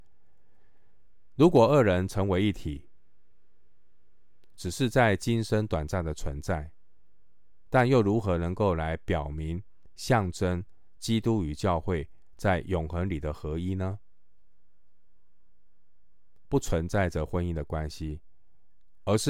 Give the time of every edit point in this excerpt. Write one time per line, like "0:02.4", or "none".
0:04.6
0:16.5